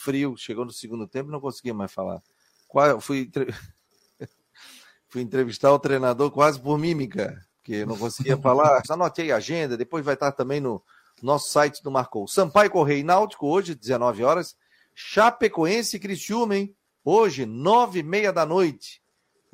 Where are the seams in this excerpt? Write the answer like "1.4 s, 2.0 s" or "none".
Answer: 8.8 s